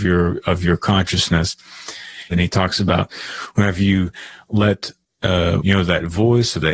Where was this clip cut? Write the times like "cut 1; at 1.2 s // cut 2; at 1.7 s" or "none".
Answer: cut 1; at 2.3 s // cut 2; at 5.6 s